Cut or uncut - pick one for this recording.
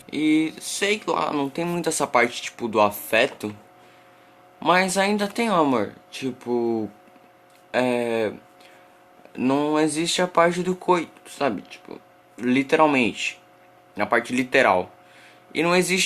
uncut